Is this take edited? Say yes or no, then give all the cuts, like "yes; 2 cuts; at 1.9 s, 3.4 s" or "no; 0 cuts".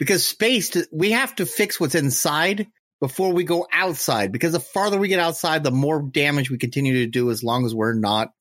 no; 0 cuts